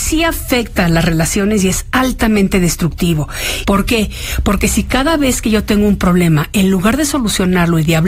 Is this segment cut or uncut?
cut